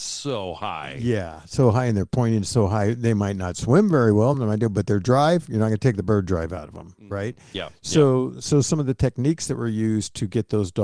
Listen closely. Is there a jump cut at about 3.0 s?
no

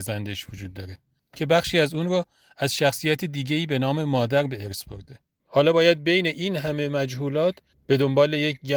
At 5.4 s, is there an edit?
yes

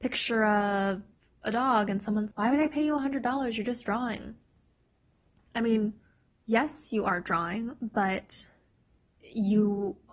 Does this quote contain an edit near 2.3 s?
yes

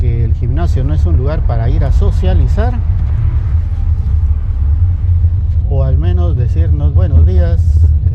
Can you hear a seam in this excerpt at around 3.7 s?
no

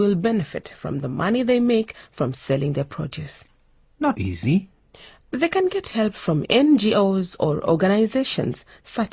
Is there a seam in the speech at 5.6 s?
no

